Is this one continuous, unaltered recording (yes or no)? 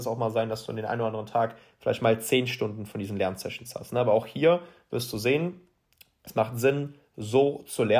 yes